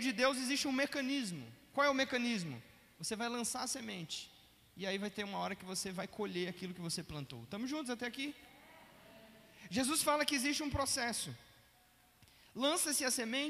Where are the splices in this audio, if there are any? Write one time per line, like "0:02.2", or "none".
none